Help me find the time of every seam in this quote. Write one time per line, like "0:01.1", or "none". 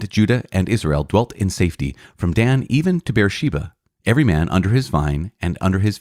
none